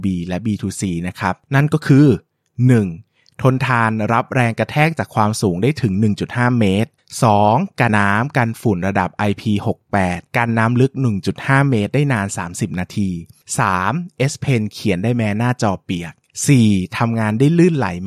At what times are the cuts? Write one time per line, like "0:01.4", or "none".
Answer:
0:07.9